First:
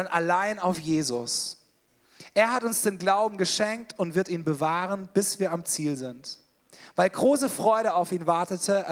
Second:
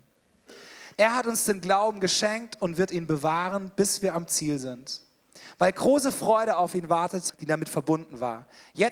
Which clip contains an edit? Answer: second; 2 cuts; at 0.9 s, 7.3 s

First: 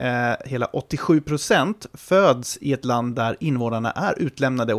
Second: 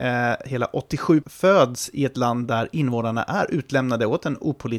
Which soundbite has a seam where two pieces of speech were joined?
second; 1 cut; at 1.2 s

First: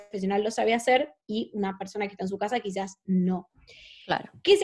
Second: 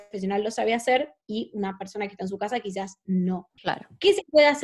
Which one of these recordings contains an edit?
second; 1 cut; at 3.6 s

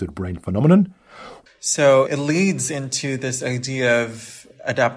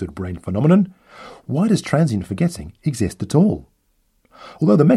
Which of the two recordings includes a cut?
first; 1 cut; at 1.5 s

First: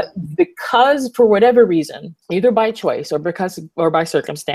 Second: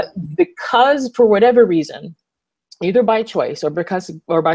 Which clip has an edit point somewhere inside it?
first; 1 cut; at 2.2 s

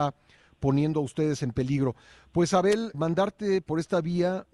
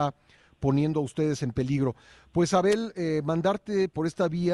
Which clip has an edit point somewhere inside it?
first; 1 cut; at 2.9 s

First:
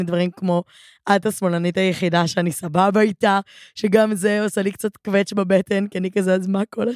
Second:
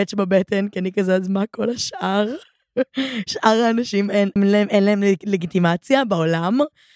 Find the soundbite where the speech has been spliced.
second; 1 cut; at 4.4 s

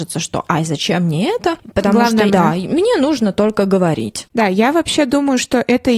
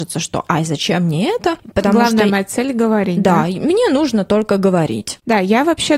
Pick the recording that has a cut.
first; 1 cut; at 2.3 s

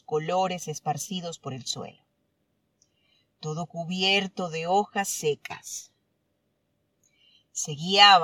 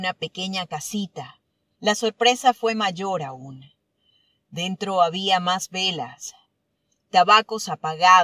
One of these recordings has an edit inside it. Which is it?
second; 1 cut; at 1.7 s

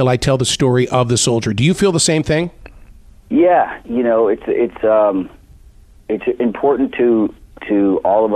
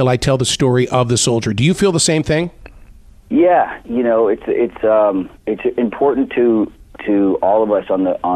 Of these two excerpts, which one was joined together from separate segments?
second; 1 cut; at 5.4 s

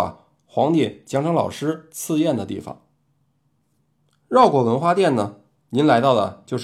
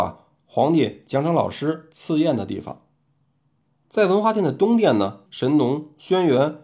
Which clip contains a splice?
second; 2 cuts; at 3.7 s, 5.3 s

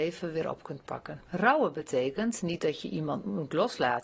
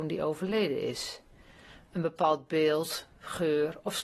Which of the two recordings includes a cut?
first; 1 cut; at 1.3 s

